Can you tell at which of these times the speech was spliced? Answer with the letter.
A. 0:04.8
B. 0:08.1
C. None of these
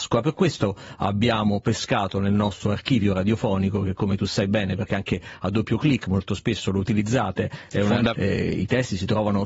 B